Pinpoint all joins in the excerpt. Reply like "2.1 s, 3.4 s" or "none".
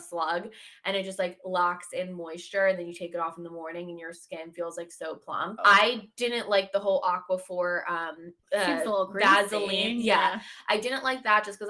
5.6 s, 8.4 s